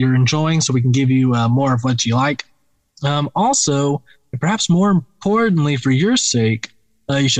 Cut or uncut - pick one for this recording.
uncut